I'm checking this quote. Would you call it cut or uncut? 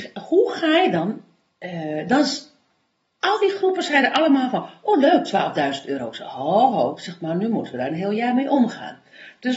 uncut